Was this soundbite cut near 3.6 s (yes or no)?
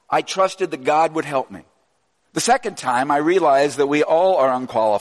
no